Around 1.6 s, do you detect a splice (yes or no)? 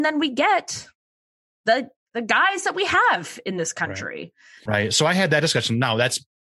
no